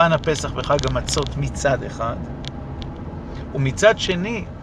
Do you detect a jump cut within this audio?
yes; 1 cut; at 3.5 s

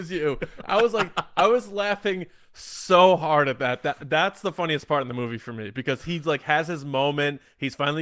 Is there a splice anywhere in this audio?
no; 0 cuts

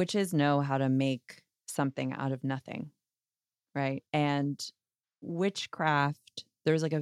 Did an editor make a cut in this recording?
yes; 1 cut; at 4.1 s

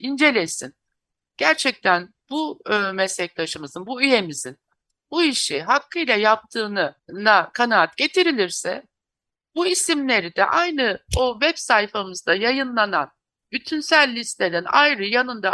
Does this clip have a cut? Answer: yes; 1 cut; at 7.0 s

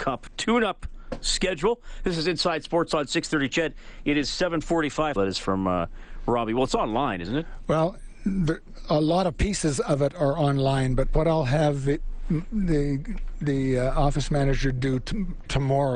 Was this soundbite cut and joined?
yes; 1 cut; at 5.2 s

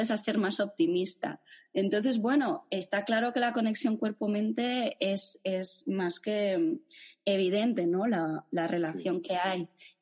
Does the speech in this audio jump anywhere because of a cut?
no; 0 cuts

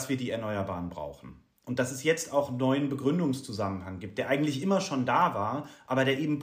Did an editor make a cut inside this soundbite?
no; 0 cuts

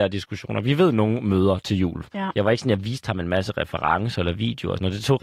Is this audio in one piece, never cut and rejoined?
no; 1 cut; at 2.1 s

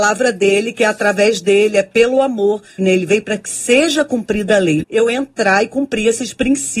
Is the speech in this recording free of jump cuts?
no; 2 cuts; at 2.8 s, 4.8 s

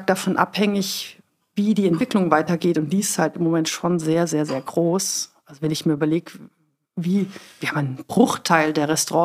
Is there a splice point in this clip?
no; 0 cuts

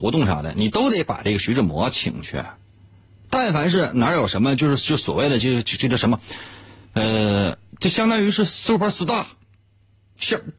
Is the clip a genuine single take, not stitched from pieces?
yes; 0 cuts

